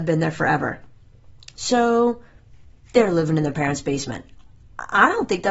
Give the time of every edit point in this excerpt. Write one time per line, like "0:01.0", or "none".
0:01.6